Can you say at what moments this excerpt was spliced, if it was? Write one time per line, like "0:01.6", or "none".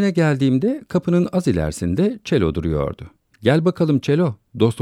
none